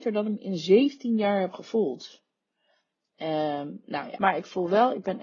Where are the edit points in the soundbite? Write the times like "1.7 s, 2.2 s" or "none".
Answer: 4.2 s